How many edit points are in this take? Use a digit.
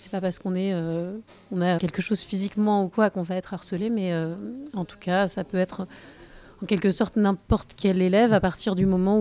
1